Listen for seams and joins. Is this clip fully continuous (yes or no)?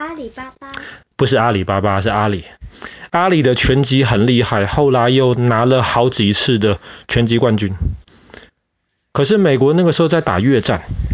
yes